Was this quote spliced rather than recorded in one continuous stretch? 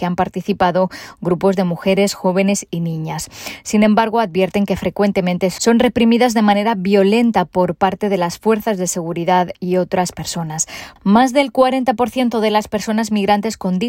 yes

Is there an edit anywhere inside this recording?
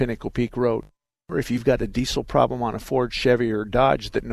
no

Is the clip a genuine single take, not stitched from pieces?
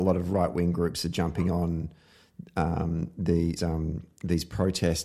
no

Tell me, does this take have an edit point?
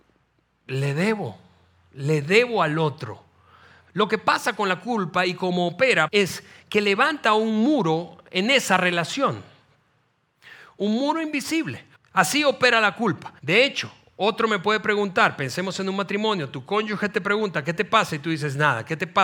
yes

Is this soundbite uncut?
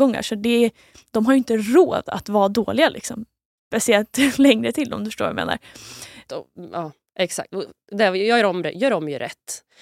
no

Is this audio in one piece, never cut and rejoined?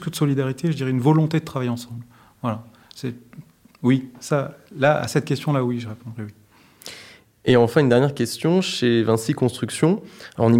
yes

